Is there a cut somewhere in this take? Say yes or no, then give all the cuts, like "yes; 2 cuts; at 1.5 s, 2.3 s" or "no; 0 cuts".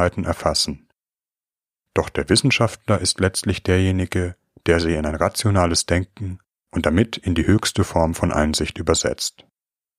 no; 0 cuts